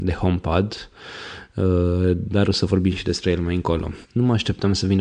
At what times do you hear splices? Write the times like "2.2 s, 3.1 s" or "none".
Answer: 4.0 s

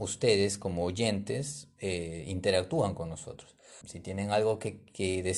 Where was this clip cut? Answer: 3.8 s

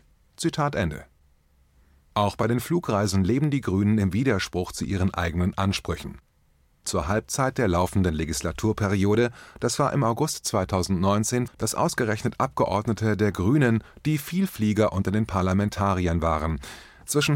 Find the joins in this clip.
11.5 s

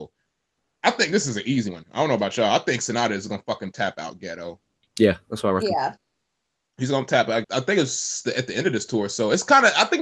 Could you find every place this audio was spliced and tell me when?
7.4 s

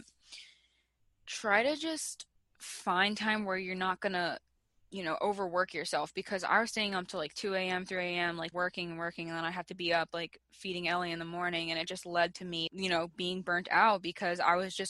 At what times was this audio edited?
8.5 s, 12.7 s

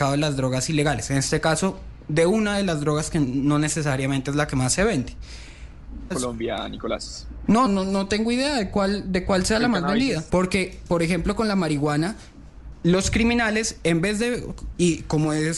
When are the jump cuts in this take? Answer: 6.1 s, 7.7 s, 10.3 s

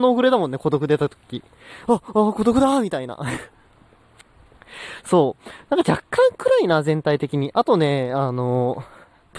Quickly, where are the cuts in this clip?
none

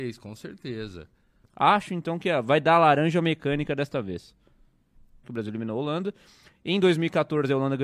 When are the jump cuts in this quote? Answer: 1.4 s, 5.2 s

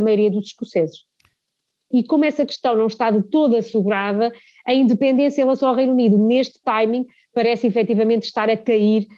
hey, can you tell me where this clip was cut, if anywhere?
1.9 s

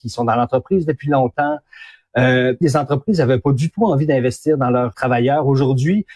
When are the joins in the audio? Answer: 2.6 s, 4.9 s

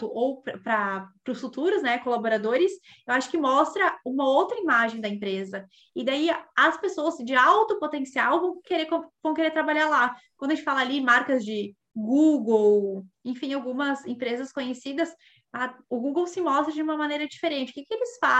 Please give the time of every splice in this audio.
15.8 s

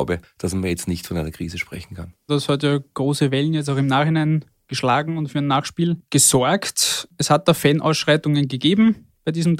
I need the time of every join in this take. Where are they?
2.3 s

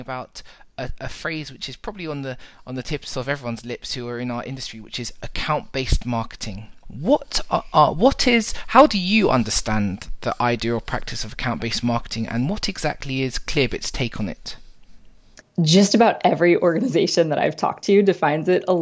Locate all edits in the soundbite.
6.8 s, 15.4 s

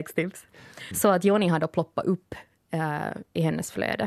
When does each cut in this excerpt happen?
0.9 s

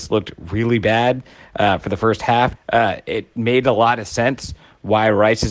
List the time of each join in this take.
2.6 s

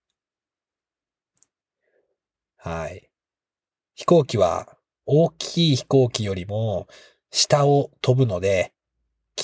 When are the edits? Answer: none

